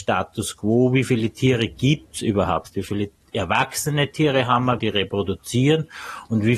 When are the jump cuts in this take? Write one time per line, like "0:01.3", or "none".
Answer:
0:04.8